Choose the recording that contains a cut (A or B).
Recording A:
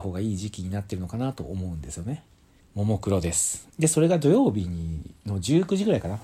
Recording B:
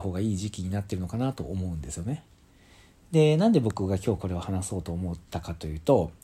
A